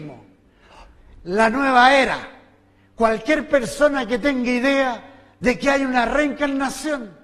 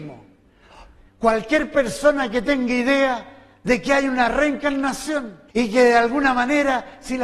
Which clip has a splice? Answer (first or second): second